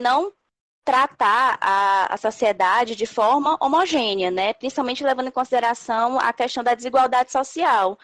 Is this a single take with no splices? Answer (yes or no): yes